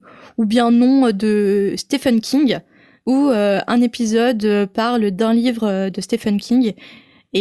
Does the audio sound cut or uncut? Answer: cut